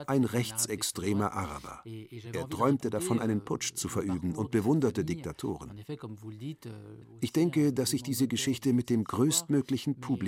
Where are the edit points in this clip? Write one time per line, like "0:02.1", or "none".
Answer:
none